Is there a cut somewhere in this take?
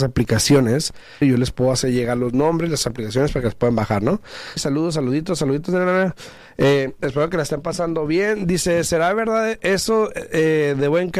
yes; 2 cuts; at 1.2 s, 4.6 s

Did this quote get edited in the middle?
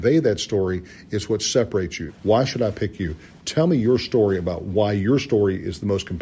yes; 1 cut; at 2.1 s

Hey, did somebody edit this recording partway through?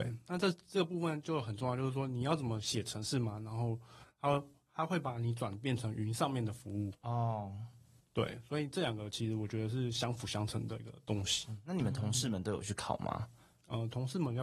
no; 0 cuts

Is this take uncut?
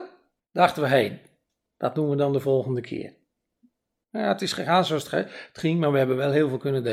yes; 0 cuts

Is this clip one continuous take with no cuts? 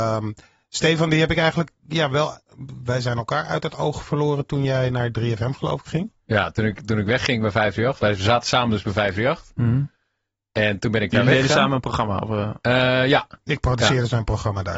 yes; 0 cuts

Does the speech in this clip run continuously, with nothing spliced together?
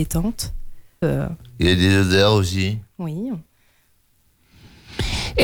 no; 1 cut; at 1.0 s

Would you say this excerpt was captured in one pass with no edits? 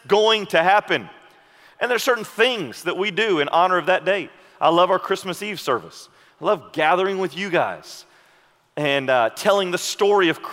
yes; 0 cuts

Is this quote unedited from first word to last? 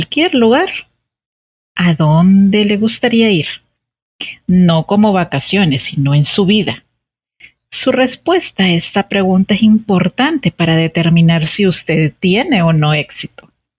yes; 0 cuts

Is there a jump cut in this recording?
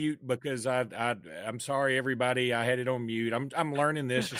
no; 0 cuts

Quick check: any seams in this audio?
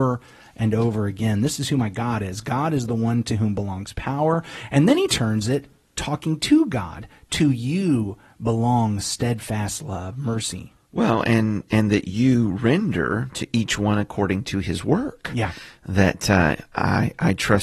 no; 0 cuts

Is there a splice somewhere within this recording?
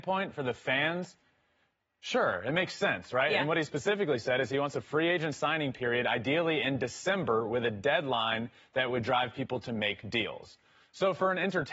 no; 0 cuts

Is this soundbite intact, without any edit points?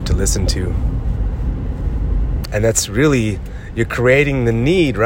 no; 1 cut; at 2.4 s

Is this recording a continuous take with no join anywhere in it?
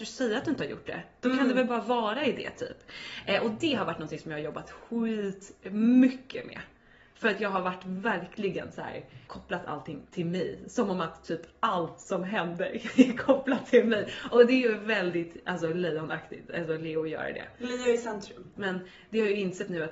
no; 2 cuts; at 9.3 s, 18.6 s

